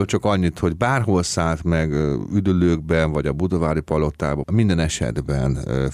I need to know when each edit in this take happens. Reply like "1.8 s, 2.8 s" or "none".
4.4 s